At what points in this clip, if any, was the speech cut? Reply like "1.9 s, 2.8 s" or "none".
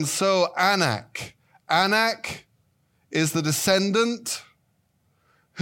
none